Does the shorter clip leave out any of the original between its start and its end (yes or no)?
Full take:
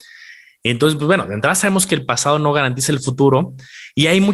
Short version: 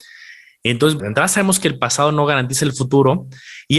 yes